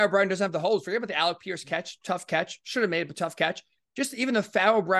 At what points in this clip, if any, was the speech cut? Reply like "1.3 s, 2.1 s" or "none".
none

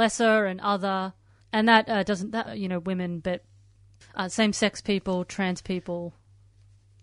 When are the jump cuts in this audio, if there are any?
1.4 s, 2.4 s

